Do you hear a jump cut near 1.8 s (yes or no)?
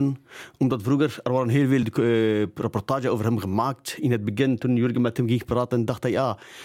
no